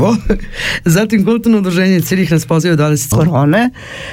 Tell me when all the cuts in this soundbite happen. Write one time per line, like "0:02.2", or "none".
0:03.1